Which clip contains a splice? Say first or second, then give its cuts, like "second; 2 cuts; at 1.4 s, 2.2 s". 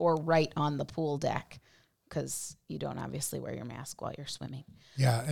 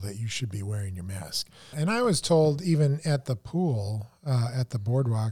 second; 1 cut; at 1.7 s